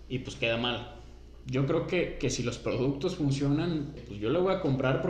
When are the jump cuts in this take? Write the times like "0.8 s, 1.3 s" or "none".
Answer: 1.4 s, 4.0 s